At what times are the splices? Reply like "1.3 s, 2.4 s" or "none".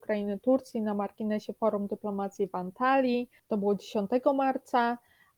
3.4 s